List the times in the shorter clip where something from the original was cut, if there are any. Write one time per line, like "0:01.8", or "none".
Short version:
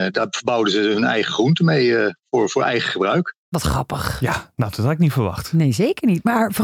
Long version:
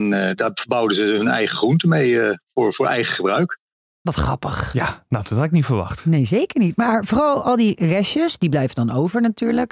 0:03.4